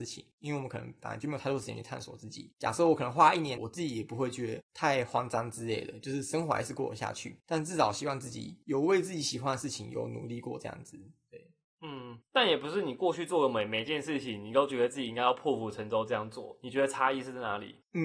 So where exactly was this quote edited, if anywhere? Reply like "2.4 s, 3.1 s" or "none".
2.5 s, 3.6 s